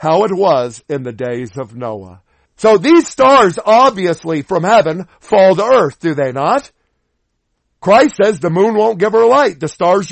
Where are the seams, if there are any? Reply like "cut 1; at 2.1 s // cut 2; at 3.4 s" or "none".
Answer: cut 1; at 2.5 s